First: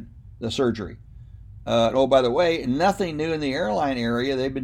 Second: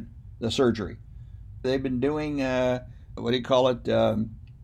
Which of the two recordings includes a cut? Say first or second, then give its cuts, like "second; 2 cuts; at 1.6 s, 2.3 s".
second; 2 cuts; at 1.6 s, 3.2 s